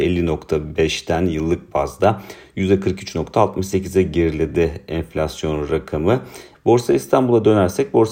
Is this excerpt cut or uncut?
cut